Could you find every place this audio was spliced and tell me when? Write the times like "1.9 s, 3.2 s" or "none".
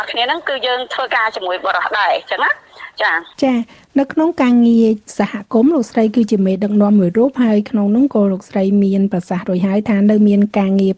3.3 s

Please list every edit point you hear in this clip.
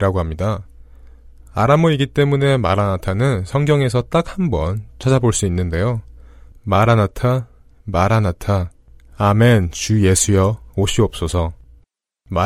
6.5 s

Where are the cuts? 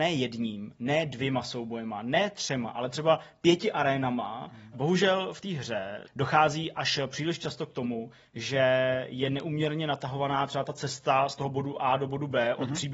4.7 s, 6.0 s

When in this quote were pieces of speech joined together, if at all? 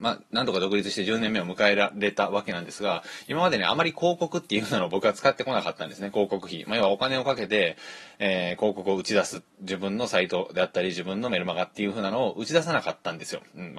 none

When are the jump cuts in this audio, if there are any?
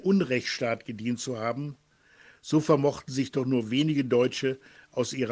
none

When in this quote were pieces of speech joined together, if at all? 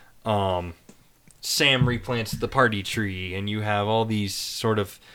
none

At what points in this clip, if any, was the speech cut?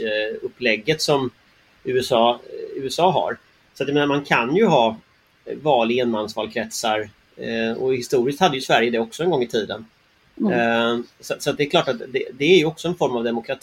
12.4 s

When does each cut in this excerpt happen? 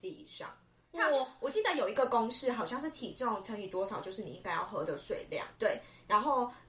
5.6 s

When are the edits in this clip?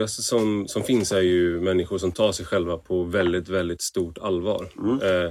none

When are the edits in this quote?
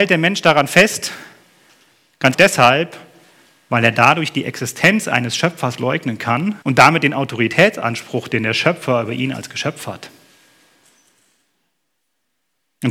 2.3 s, 6.6 s

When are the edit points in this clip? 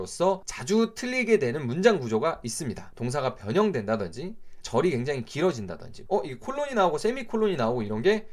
4.6 s, 6.1 s

